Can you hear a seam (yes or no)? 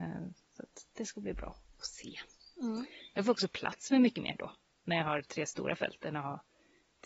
no